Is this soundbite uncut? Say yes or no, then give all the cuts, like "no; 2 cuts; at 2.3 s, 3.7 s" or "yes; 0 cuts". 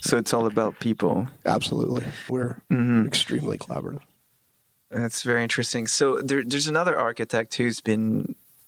no; 1 cut; at 2.3 s